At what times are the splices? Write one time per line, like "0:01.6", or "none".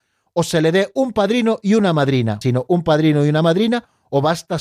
0:02.4